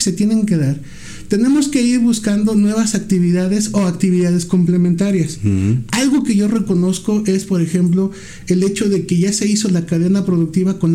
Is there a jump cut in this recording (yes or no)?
no